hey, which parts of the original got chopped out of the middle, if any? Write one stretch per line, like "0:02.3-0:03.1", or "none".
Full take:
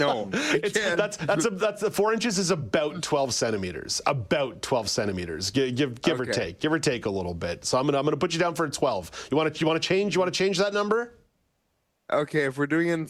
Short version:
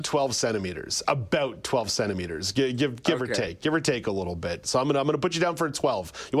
none